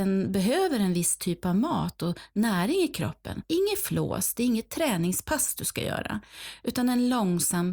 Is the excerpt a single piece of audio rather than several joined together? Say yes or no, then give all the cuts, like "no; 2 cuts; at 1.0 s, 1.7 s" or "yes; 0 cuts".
no; 1 cut; at 3.4 s